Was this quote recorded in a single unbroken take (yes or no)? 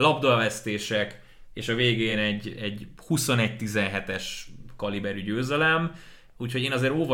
yes